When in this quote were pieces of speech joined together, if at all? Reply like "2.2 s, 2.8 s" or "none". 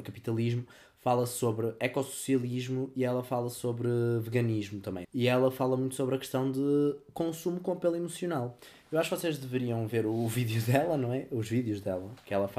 5.0 s